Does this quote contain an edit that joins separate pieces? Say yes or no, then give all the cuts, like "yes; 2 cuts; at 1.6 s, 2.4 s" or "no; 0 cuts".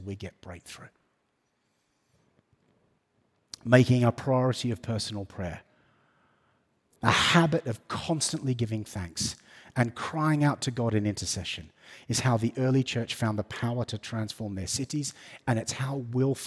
no; 0 cuts